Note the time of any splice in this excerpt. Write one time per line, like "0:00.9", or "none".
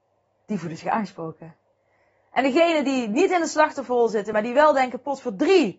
none